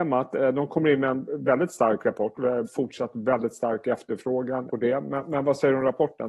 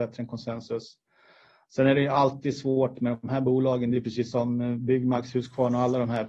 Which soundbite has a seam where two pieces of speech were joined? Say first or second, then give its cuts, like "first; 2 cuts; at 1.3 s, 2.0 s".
first; 2 cuts; at 2.6 s, 4.7 s